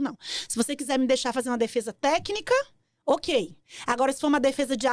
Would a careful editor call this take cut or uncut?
uncut